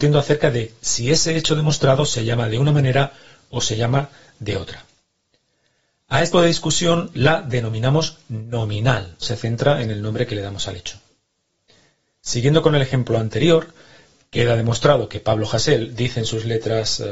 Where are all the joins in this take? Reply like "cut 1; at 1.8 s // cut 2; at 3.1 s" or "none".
cut 1; at 6.3 s // cut 2; at 9.2 s